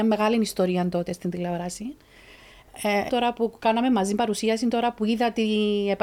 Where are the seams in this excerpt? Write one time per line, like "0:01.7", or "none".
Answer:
0:03.1